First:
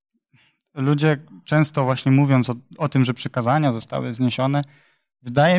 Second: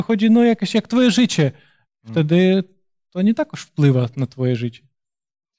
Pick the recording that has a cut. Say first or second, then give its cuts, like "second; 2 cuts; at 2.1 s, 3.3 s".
second; 1 cut; at 1.9 s